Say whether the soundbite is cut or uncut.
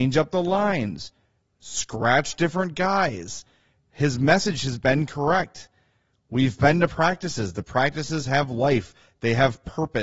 uncut